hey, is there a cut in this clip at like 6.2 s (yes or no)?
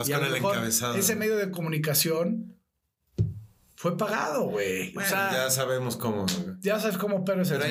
no